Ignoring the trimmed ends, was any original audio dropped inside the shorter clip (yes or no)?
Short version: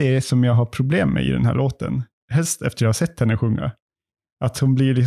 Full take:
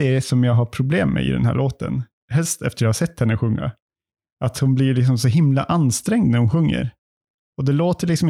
no